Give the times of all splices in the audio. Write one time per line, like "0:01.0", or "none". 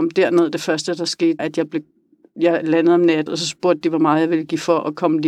0:01.4
0:03.3

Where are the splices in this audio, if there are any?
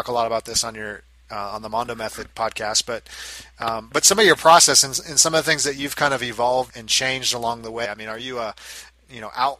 0:06.7
0:07.9

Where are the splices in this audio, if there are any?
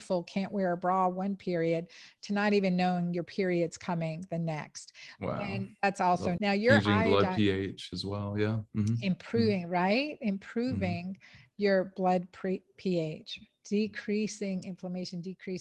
0:06.4

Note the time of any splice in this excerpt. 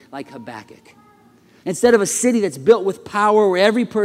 0:01.6

